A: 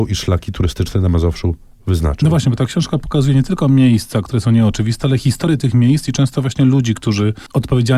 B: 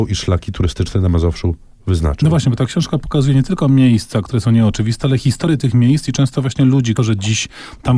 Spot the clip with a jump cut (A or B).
B